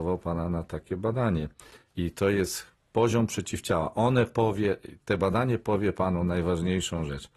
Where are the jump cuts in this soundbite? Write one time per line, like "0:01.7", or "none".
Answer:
none